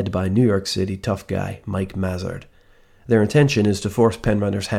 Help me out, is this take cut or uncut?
uncut